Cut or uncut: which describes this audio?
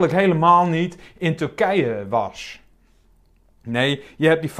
uncut